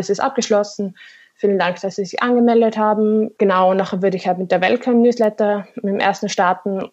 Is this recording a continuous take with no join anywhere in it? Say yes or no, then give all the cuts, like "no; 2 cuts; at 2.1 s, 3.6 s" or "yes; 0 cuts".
no; 1 cut; at 3.4 s